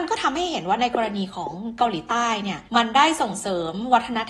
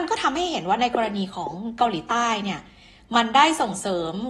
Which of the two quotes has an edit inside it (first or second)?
first